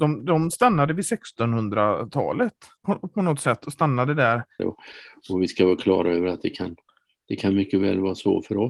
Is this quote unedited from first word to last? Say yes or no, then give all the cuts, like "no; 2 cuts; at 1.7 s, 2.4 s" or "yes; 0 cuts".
no; 2 cuts; at 2.8 s, 4.6 s